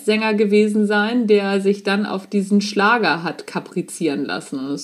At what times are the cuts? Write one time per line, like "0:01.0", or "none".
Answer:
none